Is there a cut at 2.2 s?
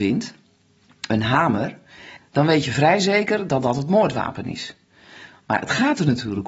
yes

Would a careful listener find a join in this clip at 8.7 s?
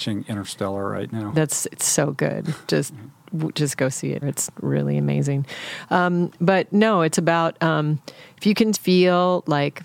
yes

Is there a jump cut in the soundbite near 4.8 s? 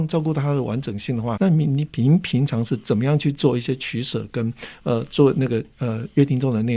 yes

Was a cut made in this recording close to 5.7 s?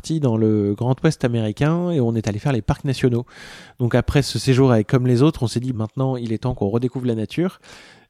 yes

